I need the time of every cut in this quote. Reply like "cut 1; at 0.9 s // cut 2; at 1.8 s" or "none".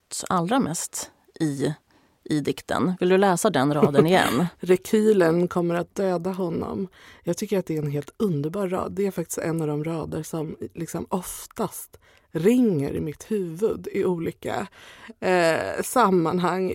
none